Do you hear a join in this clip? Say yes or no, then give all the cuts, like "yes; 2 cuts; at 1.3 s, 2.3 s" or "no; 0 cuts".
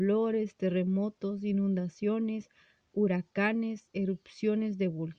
no; 0 cuts